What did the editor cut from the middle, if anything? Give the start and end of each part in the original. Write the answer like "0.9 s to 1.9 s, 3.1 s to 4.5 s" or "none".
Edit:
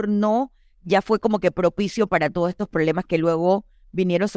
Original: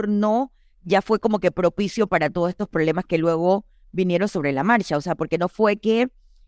none